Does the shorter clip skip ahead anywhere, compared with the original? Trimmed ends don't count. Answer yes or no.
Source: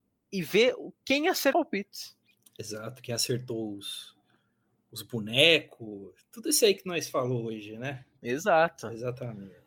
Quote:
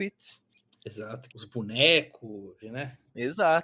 yes